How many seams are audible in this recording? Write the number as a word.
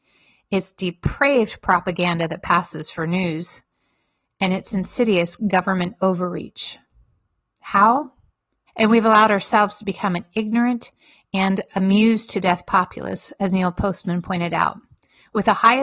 one